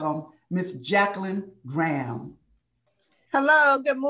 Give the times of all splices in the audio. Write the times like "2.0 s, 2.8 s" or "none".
none